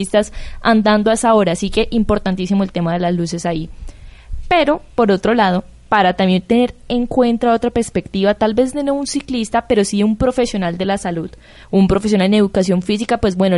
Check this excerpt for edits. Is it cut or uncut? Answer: uncut